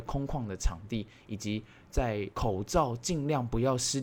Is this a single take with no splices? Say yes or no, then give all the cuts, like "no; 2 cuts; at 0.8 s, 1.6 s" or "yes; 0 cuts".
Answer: no; 1 cut; at 2.3 s